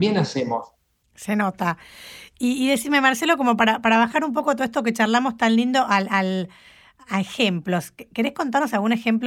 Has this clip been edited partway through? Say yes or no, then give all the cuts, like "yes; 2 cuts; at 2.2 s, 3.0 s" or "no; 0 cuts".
yes; 1 cut; at 1.0 s